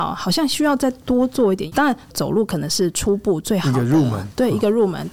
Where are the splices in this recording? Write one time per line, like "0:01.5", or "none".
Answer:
0:02.1